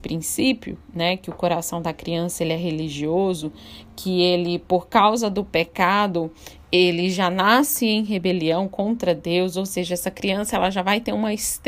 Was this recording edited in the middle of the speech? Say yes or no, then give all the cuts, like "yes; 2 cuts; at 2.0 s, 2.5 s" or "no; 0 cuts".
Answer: no; 0 cuts